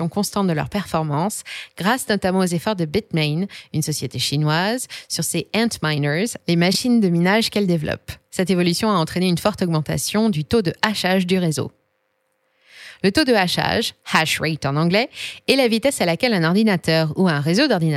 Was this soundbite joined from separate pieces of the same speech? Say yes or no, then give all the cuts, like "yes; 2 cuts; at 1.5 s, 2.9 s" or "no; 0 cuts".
no; 0 cuts